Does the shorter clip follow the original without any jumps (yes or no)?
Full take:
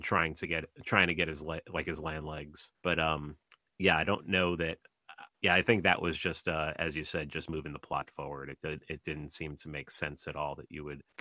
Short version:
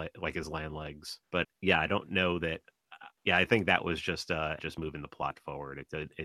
no